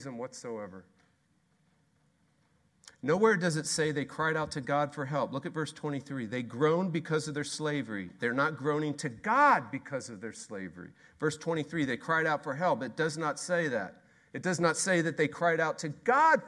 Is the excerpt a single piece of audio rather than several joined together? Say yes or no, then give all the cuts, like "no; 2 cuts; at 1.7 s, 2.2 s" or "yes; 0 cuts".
yes; 0 cuts